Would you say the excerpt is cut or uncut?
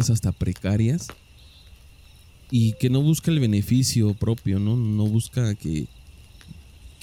uncut